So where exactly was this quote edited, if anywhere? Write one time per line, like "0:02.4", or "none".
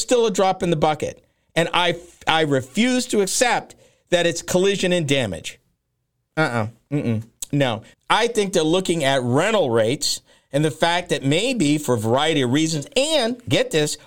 0:07.9